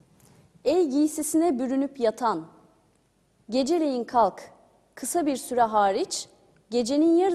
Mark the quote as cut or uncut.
uncut